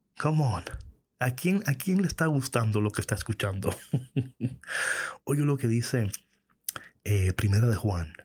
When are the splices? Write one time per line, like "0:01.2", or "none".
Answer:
none